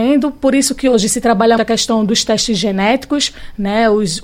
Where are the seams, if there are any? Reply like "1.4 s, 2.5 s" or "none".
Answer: 1.6 s